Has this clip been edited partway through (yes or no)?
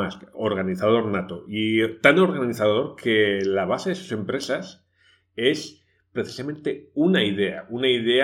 no